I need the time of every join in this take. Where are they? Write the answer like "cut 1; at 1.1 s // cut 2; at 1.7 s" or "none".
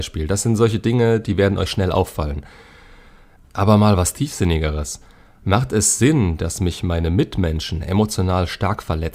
none